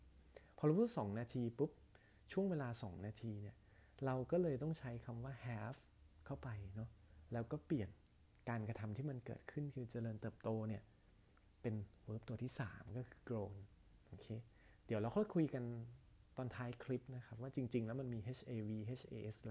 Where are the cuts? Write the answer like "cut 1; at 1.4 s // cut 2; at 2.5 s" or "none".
none